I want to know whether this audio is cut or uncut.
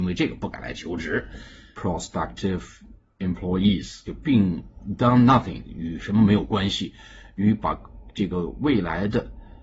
cut